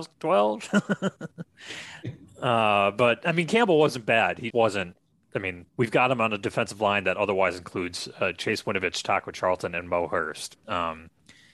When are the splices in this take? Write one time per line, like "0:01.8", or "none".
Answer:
0:04.5
0:05.7